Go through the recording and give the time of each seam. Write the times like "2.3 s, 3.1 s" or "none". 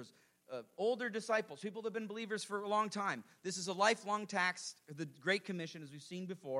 none